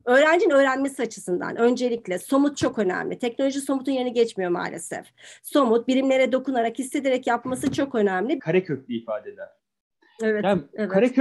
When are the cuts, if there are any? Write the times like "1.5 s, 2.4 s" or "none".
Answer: 8.4 s